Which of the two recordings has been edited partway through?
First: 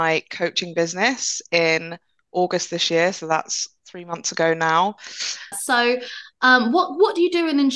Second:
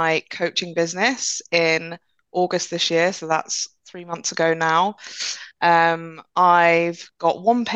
first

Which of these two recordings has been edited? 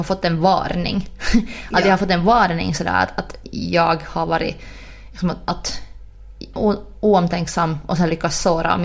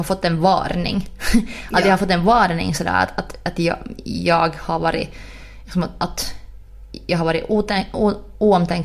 first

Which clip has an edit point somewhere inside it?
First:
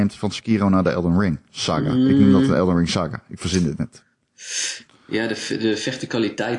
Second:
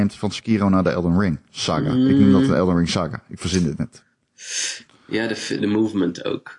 second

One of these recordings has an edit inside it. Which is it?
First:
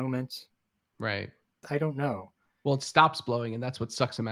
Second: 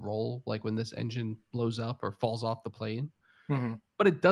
first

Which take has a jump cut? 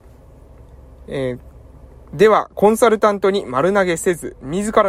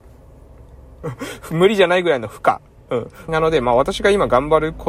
second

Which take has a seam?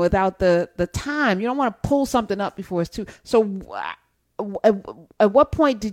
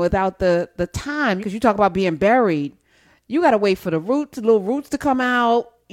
second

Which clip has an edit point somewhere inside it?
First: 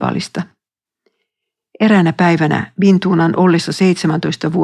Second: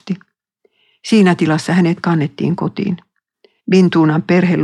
second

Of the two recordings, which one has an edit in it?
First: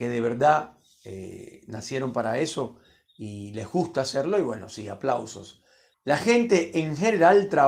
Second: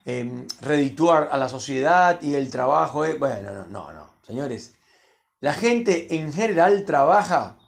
first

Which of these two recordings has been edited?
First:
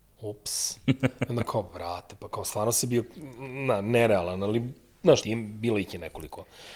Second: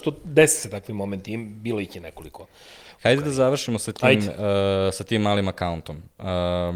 first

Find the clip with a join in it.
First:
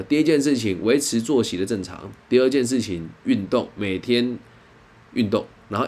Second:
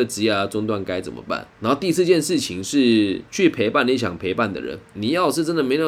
second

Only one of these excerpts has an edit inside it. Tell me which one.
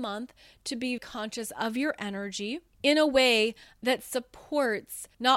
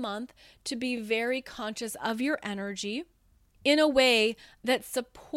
first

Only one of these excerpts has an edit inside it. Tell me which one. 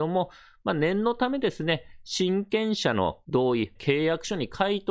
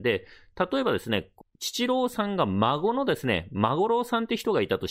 first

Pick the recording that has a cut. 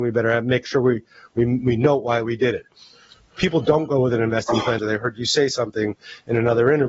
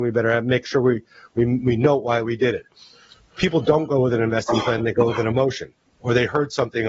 first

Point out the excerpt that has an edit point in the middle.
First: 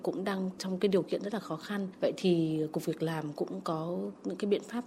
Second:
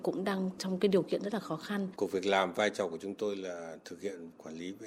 second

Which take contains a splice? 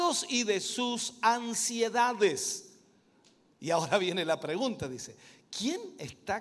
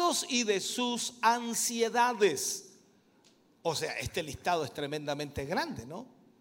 first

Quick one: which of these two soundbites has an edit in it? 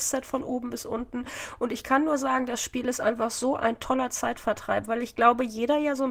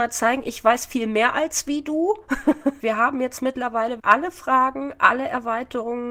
second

